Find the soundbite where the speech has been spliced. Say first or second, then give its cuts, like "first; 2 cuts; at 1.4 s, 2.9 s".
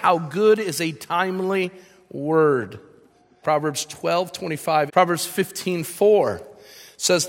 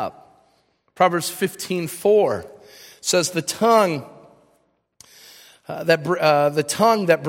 first; 2 cuts; at 3.4 s, 4.9 s